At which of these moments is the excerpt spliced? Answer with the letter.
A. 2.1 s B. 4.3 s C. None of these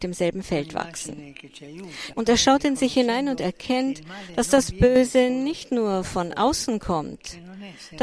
A